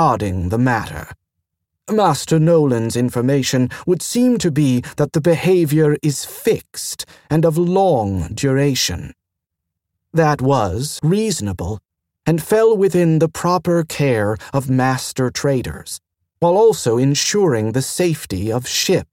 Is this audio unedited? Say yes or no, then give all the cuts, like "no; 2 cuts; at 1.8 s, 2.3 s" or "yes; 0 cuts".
no; 1 cut; at 11.0 s